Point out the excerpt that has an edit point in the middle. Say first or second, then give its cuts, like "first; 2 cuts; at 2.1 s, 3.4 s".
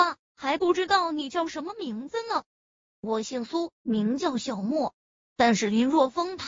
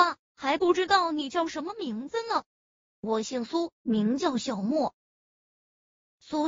first; 1 cut; at 5.3 s